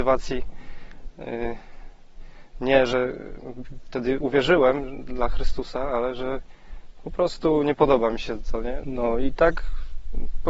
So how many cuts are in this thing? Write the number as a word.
one